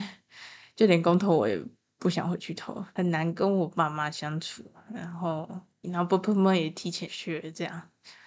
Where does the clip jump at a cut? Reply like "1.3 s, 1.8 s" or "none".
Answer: 5.8 s, 7.1 s